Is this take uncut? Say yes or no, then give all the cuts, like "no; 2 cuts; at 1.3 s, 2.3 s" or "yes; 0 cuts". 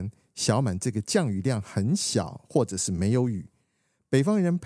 yes; 0 cuts